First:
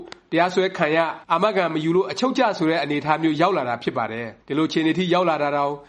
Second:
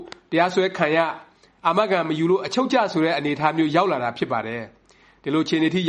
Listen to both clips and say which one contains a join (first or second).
first